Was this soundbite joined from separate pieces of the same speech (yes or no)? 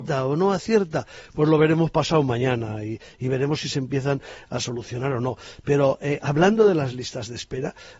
no